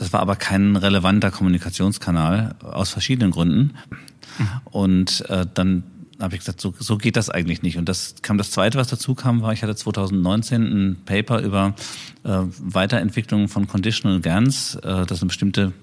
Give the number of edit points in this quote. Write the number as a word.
one